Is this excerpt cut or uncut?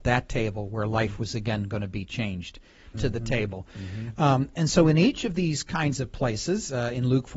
cut